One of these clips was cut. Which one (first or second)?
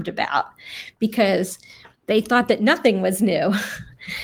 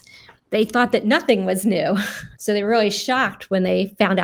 second